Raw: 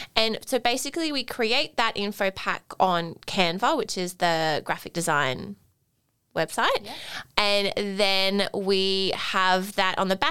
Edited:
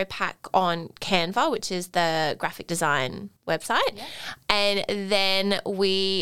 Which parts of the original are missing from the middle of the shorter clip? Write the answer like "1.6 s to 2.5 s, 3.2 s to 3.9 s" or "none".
5.6 s to 6.2 s